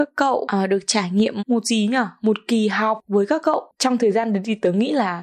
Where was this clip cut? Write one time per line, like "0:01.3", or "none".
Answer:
0:01.4